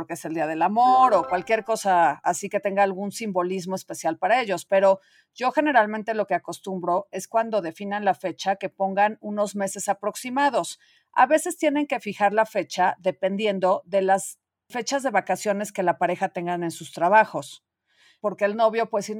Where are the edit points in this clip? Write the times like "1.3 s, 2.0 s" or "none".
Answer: none